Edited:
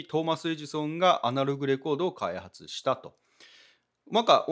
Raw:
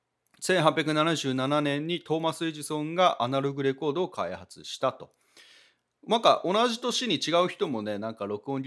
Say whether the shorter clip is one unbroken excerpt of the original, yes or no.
yes